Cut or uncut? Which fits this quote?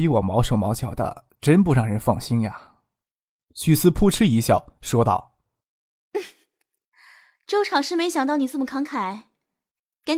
uncut